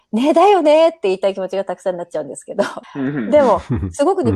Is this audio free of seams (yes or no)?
no